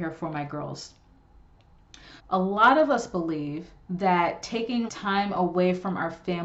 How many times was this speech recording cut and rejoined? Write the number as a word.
two